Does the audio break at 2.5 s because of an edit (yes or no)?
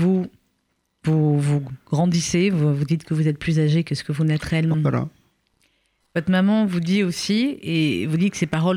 no